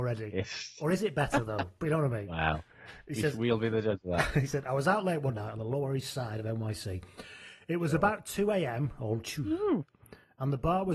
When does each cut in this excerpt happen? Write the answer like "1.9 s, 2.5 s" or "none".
none